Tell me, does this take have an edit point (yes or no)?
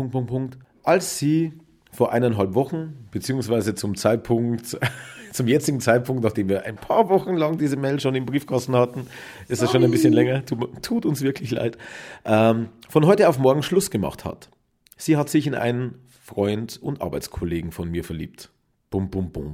no